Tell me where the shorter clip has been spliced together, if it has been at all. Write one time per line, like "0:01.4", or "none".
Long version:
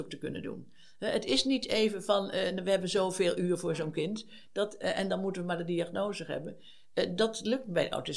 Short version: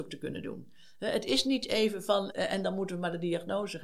0:02.3